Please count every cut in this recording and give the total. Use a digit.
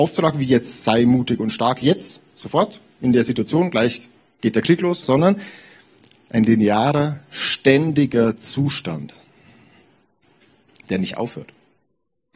1